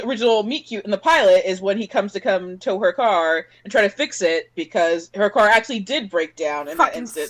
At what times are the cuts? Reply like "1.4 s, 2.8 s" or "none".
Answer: none